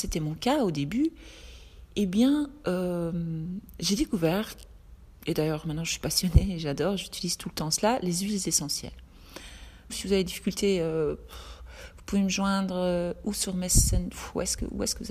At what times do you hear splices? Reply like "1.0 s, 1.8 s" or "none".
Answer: 9.9 s